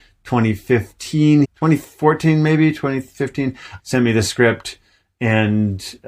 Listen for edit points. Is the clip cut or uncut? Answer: cut